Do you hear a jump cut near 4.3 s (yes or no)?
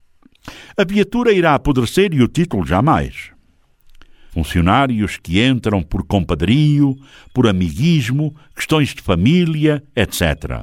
yes